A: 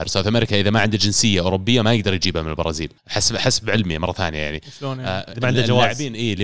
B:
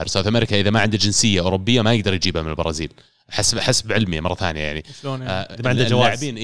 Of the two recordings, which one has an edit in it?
A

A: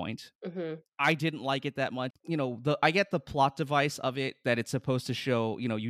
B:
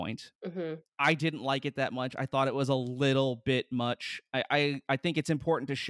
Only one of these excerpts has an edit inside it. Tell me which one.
A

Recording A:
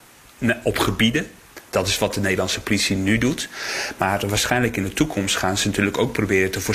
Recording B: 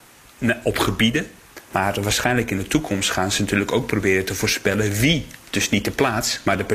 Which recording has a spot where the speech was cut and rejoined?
B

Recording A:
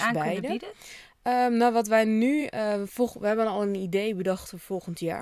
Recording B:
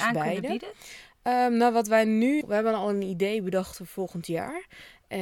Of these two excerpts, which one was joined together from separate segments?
B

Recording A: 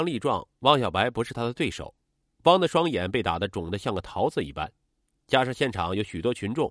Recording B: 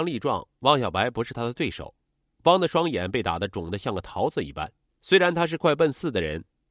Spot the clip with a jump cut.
B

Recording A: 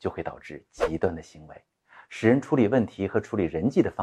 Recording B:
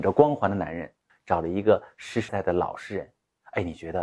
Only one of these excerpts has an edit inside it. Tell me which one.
B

